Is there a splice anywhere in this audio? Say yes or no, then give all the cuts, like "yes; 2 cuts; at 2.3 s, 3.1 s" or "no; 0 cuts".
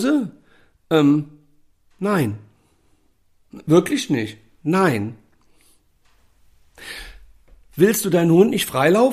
no; 0 cuts